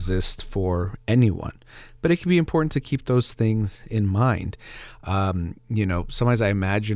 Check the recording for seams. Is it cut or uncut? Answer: uncut